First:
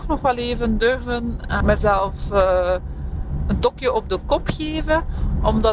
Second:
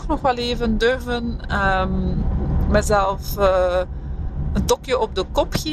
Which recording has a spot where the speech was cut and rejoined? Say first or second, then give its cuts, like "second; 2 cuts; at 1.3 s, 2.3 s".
first; 1 cut; at 1.6 s